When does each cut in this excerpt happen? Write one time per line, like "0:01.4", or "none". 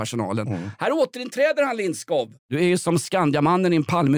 0:02.4